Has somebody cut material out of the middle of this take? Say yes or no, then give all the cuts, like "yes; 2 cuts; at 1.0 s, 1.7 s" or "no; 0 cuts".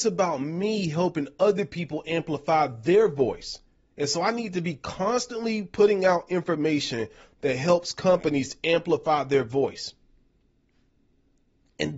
no; 0 cuts